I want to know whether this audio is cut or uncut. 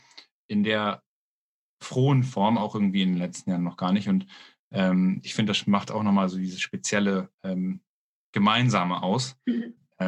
cut